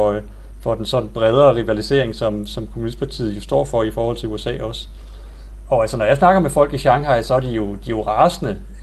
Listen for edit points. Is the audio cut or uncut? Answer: uncut